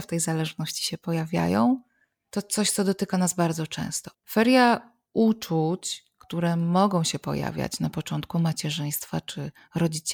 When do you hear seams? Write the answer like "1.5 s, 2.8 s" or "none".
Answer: 4.1 s